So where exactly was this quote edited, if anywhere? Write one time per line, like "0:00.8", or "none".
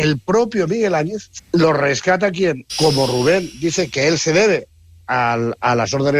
0:01.4
0:02.7